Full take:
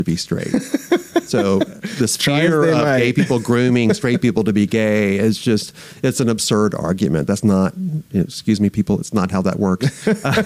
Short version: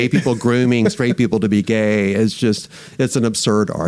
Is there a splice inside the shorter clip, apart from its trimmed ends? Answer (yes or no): no